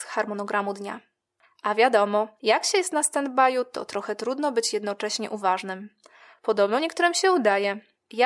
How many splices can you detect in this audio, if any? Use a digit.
1